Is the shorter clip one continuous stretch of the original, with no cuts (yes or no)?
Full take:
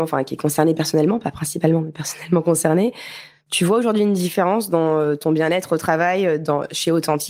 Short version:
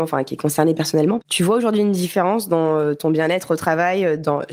no